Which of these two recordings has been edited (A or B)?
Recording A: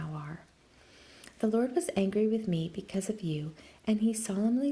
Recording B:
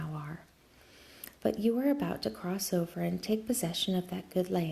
B